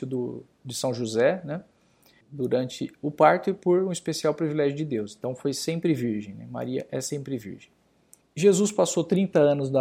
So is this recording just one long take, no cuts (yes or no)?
no